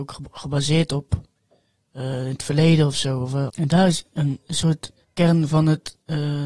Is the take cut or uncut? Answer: cut